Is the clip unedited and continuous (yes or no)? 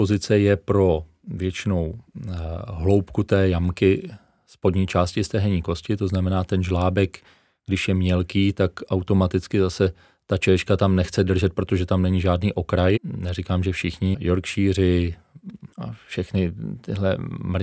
no